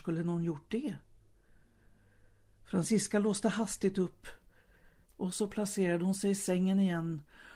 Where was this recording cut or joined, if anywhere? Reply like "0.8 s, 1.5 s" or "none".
5.1 s

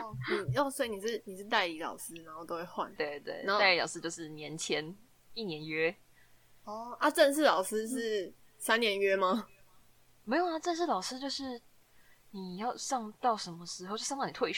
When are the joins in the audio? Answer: 3.0 s

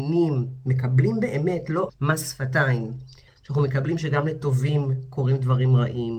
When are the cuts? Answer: 1.9 s, 3.3 s

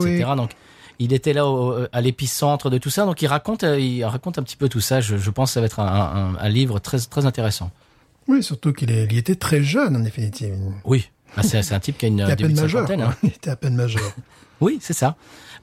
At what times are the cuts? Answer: none

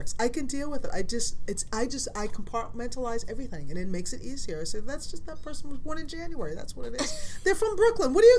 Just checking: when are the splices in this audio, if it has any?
none

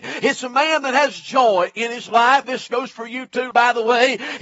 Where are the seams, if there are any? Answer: 2.4 s, 3.5 s

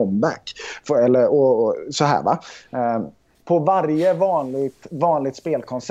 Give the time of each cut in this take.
3.3 s

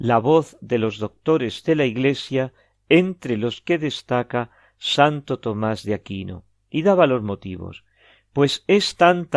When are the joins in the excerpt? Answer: none

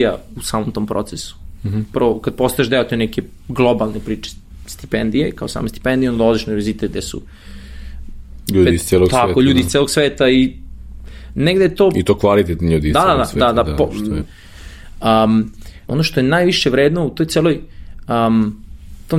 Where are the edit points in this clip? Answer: 14.2 s, 15.9 s

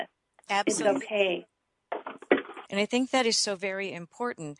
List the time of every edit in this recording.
2.7 s

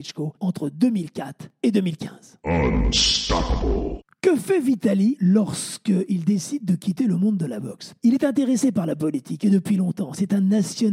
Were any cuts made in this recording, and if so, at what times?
none

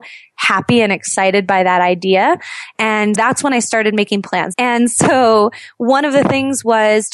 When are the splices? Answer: 3.2 s, 4.5 s

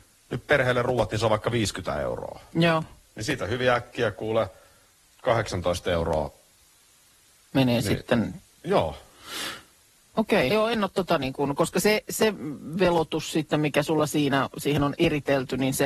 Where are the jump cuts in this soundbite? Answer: 8.5 s, 10.5 s

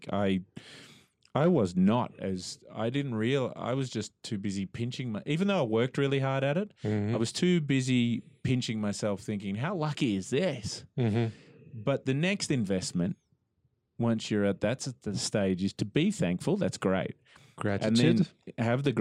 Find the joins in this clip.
none

